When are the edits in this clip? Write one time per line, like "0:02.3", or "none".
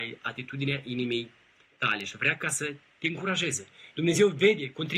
0:03.9